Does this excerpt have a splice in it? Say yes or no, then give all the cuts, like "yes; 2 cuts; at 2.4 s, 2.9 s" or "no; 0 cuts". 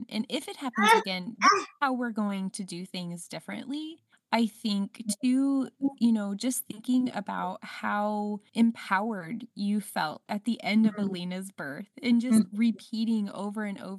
no; 0 cuts